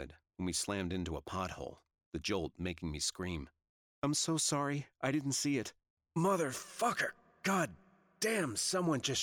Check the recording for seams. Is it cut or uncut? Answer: uncut